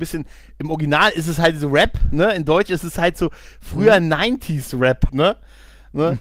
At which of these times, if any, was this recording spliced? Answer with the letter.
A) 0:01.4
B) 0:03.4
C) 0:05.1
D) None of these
C